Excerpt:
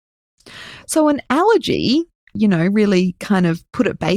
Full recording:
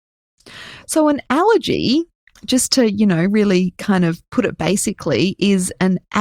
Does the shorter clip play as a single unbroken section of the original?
no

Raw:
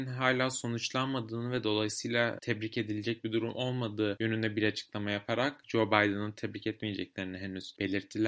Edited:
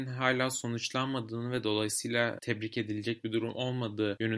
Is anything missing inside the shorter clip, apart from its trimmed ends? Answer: no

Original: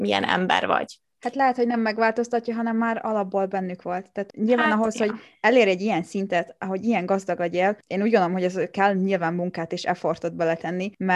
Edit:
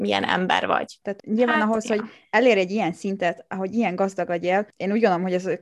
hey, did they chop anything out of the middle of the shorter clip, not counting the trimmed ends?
yes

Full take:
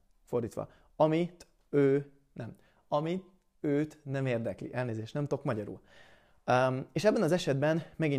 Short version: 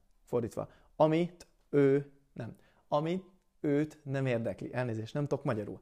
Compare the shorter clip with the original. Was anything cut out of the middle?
no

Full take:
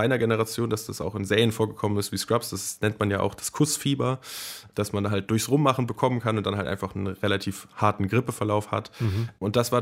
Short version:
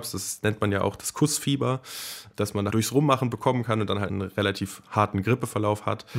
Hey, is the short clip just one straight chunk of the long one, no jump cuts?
no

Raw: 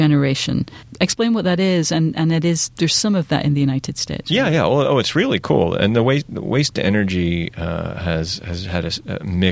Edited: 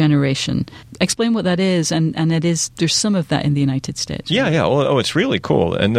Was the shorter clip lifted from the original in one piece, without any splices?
yes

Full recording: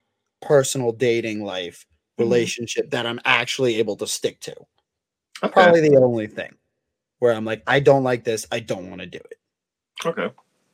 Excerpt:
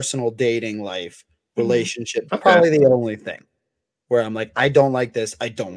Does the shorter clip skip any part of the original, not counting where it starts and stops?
yes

